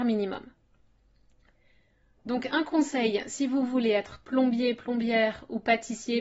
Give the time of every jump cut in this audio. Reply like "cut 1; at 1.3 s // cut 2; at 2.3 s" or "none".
cut 1; at 2.2 s